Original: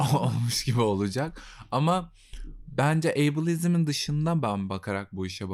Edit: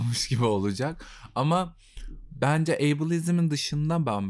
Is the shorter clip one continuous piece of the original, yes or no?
yes